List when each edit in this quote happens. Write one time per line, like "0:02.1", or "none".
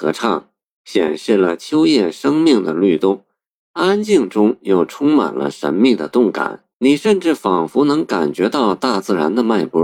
0:03.6
0:06.7